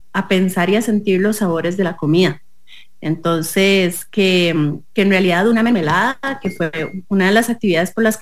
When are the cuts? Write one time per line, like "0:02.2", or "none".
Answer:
none